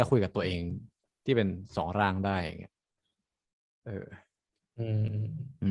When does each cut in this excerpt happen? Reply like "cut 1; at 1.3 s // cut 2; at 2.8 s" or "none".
none